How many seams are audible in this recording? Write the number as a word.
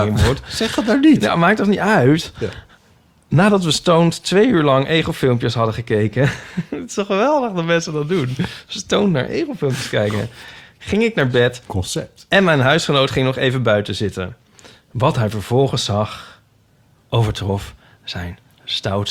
zero